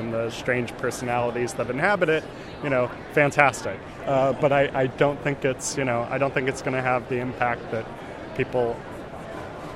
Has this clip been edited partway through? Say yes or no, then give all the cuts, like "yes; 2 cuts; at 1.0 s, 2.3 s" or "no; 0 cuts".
yes; 1 cut; at 4.0 s